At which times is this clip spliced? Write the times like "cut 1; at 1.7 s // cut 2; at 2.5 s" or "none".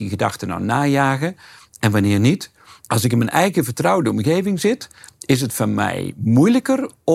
cut 1; at 2.9 s